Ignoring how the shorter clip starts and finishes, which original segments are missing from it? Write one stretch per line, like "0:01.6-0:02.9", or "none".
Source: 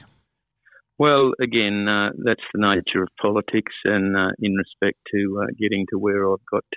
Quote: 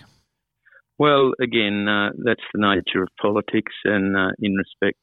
none